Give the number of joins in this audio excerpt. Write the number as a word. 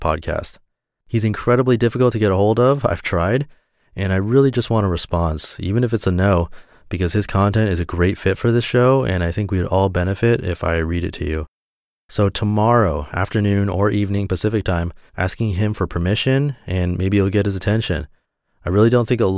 one